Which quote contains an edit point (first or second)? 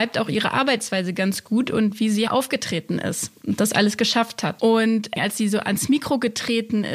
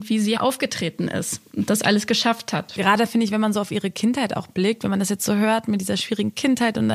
first